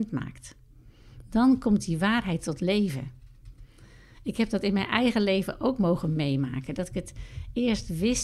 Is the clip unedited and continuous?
yes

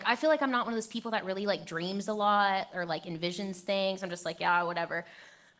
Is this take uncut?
yes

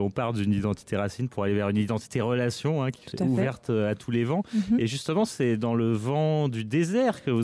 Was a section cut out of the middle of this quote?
no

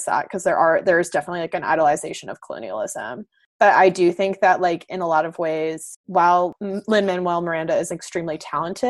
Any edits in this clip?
no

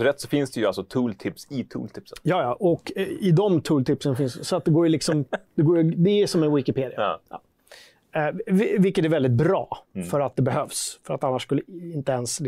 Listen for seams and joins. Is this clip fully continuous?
yes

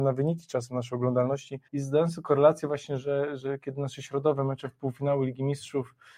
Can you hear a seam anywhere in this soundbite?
yes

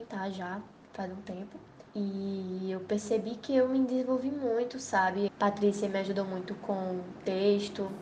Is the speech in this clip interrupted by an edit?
yes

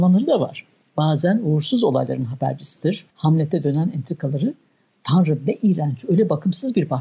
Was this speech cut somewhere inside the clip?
yes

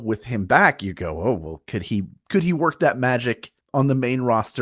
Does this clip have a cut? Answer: yes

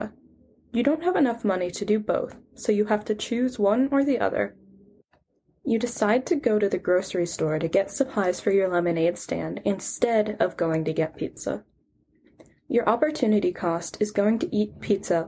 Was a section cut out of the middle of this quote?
no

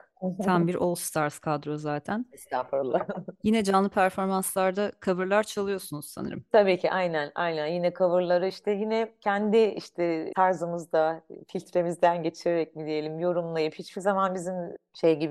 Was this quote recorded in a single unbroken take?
yes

